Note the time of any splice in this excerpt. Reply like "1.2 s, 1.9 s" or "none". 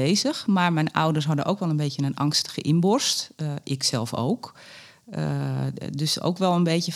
none